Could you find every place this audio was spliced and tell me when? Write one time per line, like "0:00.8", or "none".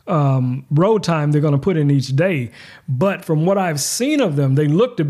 none